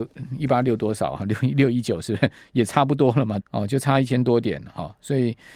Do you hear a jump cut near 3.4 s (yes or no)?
yes